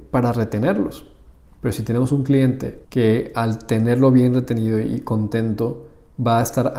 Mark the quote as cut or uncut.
cut